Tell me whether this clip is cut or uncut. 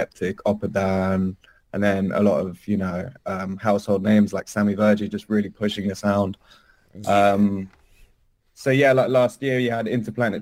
uncut